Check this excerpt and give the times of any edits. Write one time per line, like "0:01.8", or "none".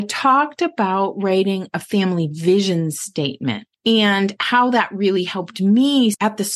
none